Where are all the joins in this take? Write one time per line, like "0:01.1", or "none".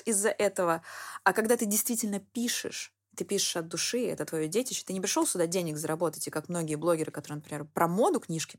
none